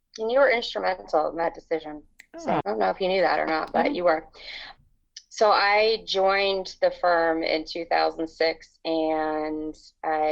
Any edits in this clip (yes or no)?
yes